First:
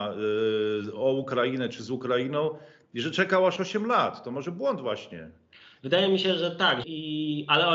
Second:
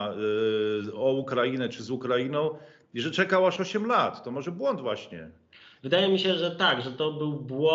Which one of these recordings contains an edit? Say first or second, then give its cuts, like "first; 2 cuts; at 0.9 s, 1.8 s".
first; 1 cut; at 6.8 s